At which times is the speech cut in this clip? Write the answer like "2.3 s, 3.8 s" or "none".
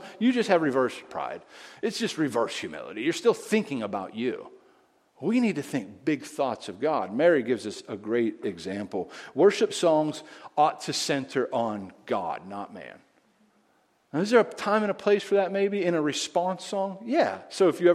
none